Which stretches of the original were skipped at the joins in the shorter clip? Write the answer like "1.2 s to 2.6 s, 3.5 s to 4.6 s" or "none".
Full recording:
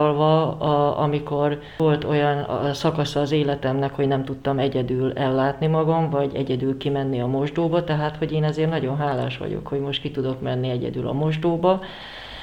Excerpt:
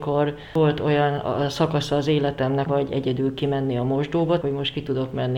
3.9 s to 6.1 s, 7.8 s to 9.7 s